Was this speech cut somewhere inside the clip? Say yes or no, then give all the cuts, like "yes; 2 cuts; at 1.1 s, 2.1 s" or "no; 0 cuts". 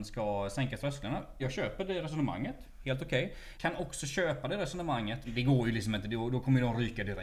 yes; 3 cuts; at 1.4 s, 3.5 s, 5.2 s